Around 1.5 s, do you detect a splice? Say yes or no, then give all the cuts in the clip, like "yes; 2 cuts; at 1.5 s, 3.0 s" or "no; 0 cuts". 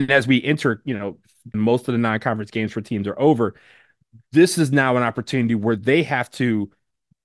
yes; 1 cut; at 1.5 s